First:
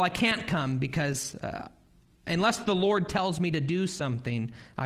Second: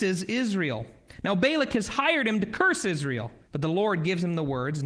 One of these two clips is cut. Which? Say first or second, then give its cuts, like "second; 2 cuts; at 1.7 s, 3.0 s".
second; 1 cut; at 3.4 s